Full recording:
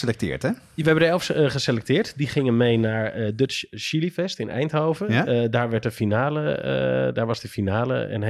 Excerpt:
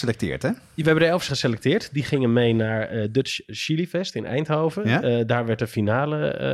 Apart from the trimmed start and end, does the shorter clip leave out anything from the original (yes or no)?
yes